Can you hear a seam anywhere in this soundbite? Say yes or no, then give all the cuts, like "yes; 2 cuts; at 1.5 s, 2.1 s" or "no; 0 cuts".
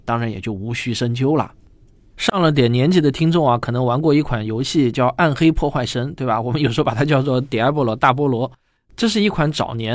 no; 0 cuts